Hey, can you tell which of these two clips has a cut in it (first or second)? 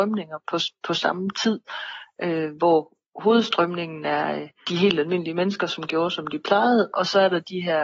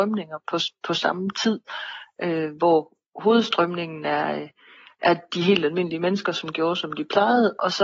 first